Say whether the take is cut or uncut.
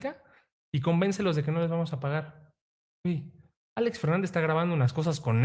uncut